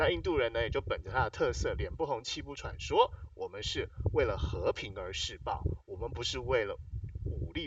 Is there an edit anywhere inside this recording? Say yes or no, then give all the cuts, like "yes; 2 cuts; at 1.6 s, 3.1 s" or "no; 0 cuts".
no; 0 cuts